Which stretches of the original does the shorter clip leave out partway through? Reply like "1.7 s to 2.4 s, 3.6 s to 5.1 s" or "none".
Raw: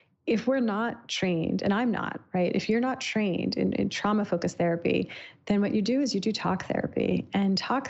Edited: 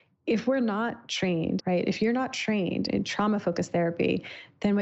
1.6 s to 2.3 s, 3.5 s to 3.7 s